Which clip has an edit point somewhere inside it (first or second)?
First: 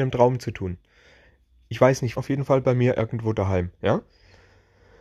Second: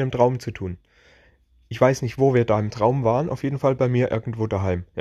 first